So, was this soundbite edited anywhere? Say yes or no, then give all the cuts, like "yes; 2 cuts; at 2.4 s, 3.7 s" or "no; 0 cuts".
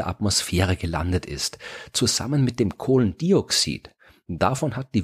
no; 0 cuts